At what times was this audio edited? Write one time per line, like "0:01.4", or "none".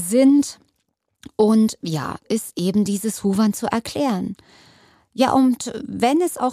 0:02.2